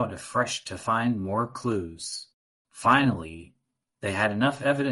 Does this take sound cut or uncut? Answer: uncut